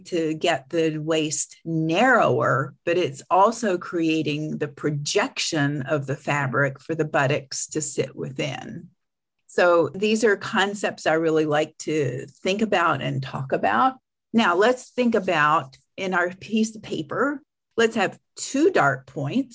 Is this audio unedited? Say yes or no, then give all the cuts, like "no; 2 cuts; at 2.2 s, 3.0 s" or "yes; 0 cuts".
yes; 0 cuts